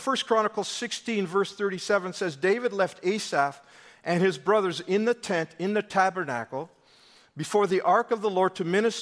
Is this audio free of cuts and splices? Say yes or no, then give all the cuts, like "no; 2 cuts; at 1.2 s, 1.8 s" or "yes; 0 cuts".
yes; 0 cuts